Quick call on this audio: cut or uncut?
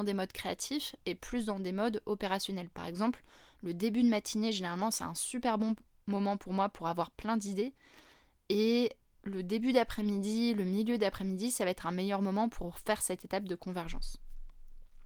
uncut